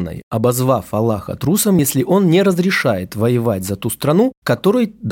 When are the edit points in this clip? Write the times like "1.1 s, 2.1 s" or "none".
none

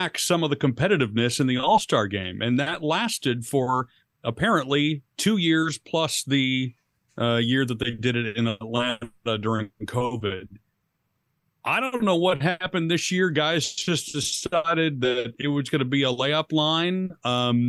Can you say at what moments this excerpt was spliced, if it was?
none

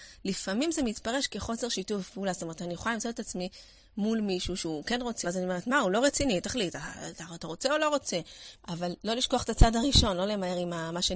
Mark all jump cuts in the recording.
5.2 s, 8.6 s

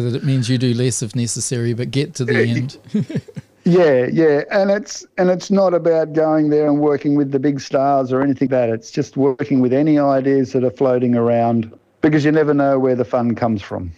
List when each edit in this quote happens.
4.5 s, 8.5 s

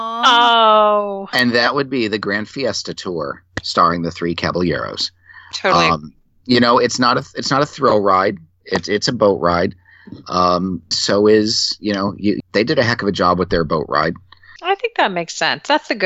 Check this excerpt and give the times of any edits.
10.9 s, 12.4 s, 14.6 s

